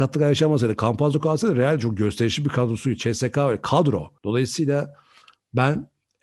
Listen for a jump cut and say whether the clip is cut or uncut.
cut